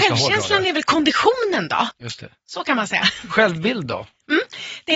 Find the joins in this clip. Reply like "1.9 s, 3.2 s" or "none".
1.9 s